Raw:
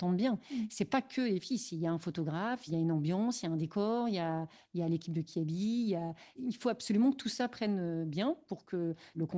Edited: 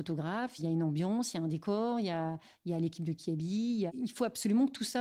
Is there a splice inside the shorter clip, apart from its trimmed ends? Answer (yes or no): yes